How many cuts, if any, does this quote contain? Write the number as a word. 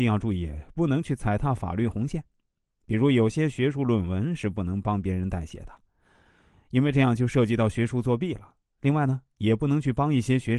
zero